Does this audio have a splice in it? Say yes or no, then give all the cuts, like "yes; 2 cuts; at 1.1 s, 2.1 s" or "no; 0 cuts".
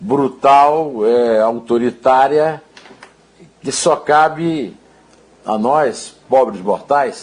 no; 0 cuts